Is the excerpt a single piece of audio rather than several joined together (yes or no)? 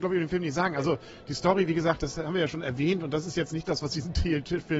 yes